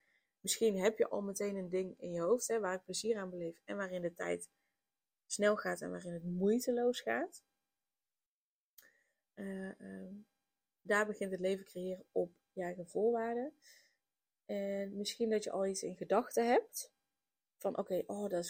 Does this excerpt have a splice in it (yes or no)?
no